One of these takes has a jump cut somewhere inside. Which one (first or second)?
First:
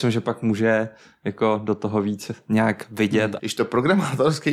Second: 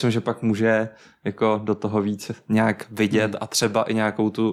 first